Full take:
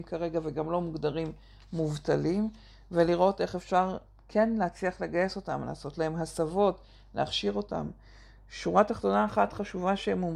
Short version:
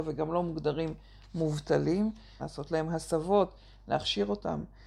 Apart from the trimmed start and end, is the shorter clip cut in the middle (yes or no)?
yes